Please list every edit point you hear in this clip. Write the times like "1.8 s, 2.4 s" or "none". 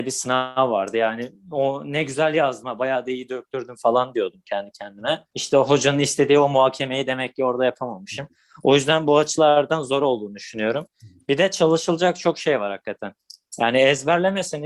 5.3 s